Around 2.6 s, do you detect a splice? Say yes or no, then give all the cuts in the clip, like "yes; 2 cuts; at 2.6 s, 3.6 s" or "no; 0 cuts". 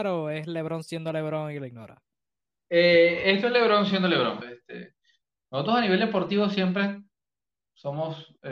no; 1 cut; at 4.4 s